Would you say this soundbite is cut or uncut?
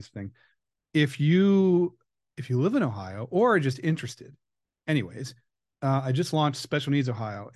uncut